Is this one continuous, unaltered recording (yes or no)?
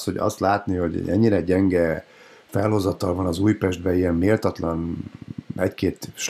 yes